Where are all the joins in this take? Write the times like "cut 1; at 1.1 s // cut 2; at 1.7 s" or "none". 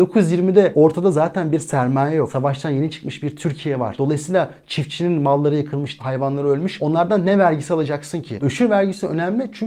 cut 1; at 6.0 s // cut 2; at 8.4 s